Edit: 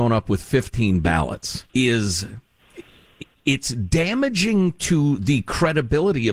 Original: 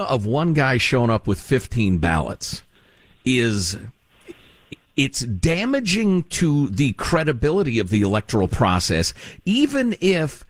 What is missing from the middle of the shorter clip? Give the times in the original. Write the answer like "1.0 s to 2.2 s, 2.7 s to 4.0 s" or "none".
2.7 s to 3.2 s